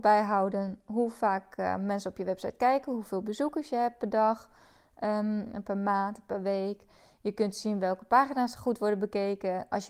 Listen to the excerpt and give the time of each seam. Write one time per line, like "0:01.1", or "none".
none